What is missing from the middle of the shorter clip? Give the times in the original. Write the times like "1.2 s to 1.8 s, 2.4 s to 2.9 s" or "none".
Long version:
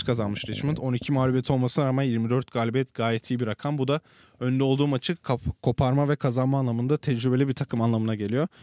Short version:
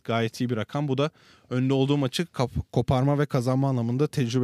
none